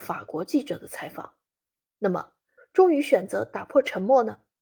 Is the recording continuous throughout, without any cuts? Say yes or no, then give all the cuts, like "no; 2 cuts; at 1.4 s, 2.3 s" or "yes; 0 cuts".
no; 1 cut; at 2.6 s